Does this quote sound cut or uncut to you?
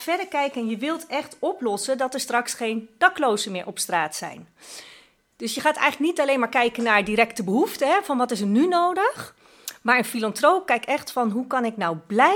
uncut